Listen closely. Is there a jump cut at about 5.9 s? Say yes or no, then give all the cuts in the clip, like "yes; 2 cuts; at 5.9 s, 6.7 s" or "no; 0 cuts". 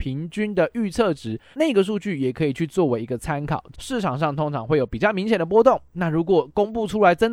no; 2 cuts; at 1.5 s, 3.7 s